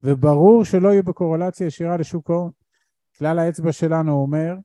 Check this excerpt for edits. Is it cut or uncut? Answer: cut